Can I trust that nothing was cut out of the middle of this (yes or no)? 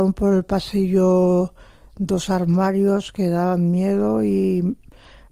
yes